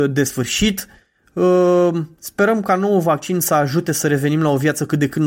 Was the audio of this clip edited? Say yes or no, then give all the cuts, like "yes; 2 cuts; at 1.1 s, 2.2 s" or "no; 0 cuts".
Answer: no; 0 cuts